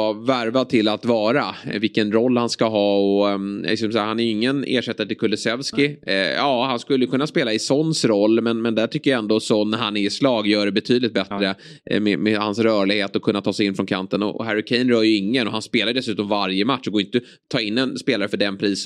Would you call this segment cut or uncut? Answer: uncut